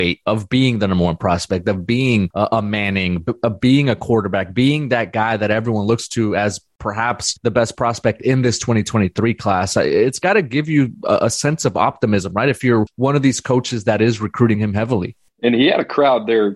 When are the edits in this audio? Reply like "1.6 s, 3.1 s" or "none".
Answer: none